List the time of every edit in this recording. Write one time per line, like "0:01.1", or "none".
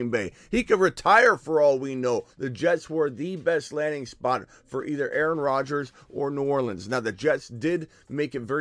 0:02.3